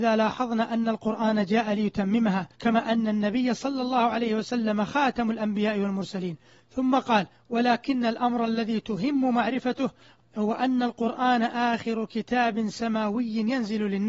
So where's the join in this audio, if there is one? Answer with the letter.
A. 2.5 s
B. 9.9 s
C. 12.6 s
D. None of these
A